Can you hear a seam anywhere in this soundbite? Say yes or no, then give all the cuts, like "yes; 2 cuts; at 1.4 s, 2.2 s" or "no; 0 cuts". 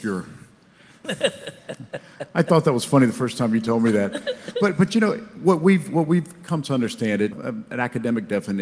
yes; 1 cut; at 7.3 s